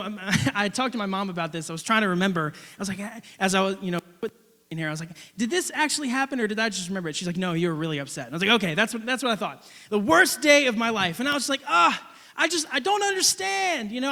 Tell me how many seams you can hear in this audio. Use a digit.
0